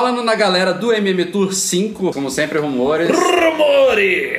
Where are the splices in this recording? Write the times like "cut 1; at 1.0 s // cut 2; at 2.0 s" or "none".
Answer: cut 1; at 2.1 s